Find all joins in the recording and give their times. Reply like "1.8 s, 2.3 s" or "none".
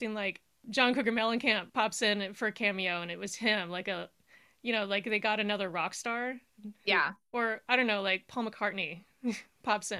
none